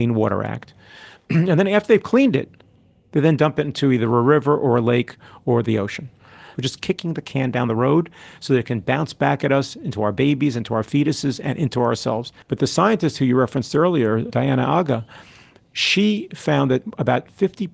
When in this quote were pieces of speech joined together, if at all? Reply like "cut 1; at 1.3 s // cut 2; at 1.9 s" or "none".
cut 1; at 6.5 s // cut 2; at 12.4 s